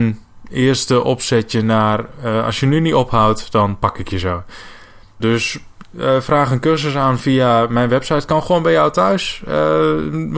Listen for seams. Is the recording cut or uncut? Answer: cut